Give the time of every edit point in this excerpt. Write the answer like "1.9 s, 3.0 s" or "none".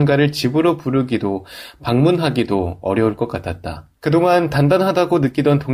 4.0 s